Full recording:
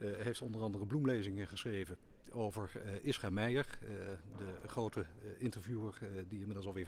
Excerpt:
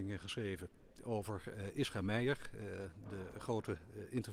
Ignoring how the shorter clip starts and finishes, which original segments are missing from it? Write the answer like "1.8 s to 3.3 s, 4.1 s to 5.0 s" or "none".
none